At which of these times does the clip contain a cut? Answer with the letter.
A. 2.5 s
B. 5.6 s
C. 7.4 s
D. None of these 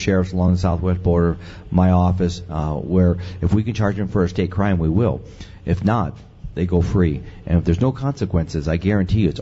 D